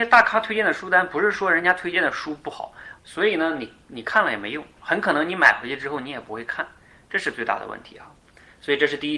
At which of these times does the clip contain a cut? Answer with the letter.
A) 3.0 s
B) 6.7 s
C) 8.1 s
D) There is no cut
A